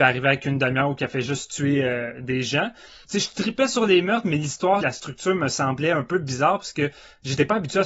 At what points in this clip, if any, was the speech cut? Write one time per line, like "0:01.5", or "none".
0:03.1
0:04.8